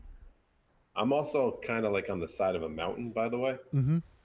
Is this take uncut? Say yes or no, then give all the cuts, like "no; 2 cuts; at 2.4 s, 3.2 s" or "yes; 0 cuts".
yes; 0 cuts